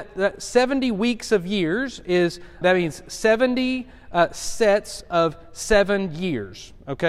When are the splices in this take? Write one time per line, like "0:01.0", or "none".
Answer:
0:02.6